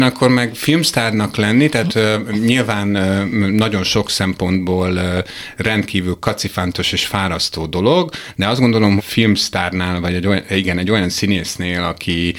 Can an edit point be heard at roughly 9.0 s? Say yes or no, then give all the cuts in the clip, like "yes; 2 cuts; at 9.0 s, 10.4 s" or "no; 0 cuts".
yes; 1 cut; at 9.0 s